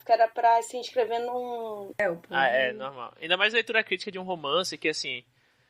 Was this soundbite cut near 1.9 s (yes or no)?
yes